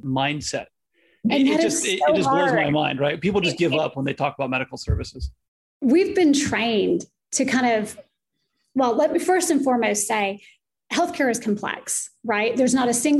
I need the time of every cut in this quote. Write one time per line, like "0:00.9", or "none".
none